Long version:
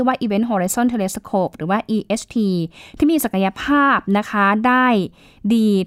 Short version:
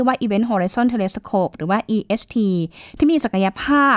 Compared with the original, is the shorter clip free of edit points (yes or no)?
yes